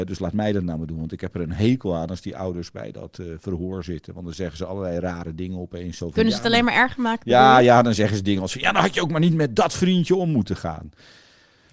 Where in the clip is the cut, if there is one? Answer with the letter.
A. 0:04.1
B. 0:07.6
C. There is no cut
C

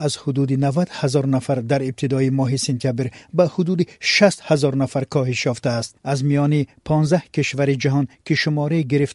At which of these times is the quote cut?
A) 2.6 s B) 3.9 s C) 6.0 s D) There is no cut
C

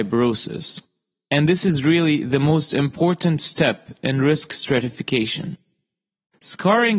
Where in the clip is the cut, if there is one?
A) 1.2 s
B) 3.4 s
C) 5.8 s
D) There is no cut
D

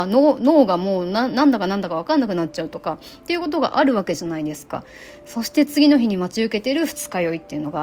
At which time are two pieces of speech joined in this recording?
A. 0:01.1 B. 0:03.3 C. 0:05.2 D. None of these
D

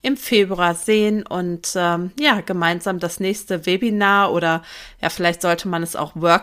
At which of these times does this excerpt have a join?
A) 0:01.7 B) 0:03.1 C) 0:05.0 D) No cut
D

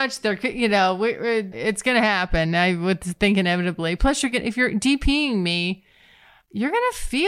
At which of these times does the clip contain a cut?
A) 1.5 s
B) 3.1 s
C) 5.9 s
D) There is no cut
A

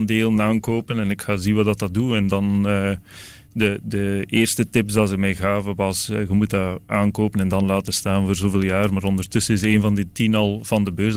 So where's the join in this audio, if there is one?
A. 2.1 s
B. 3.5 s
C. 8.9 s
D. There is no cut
D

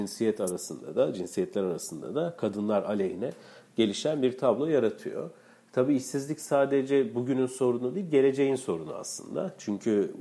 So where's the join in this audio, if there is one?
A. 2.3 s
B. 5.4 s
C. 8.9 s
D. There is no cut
D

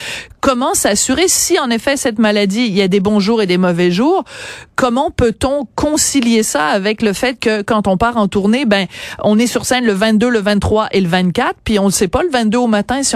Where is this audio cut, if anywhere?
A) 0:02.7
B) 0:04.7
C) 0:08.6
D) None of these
D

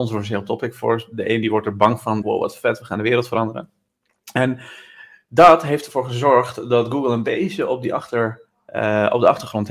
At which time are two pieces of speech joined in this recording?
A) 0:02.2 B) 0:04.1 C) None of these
A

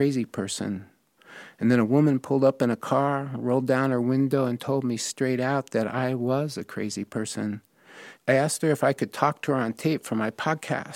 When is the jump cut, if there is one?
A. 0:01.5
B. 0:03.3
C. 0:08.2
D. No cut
C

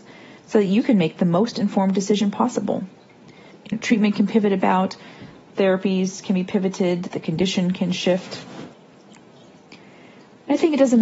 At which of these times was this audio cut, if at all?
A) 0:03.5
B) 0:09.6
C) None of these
A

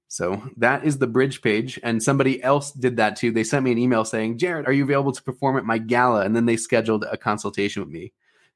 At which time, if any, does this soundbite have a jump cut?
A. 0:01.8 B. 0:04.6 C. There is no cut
B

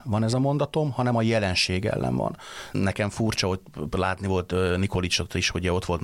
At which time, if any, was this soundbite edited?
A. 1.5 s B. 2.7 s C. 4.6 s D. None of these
B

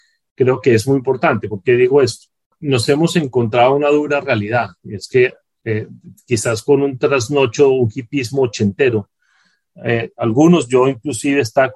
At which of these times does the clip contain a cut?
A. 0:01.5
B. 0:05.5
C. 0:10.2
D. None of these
D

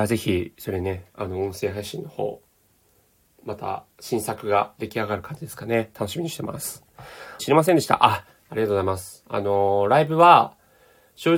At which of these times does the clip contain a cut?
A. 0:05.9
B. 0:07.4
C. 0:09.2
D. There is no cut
B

